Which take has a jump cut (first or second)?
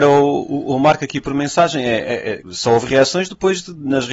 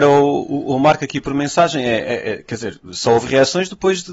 first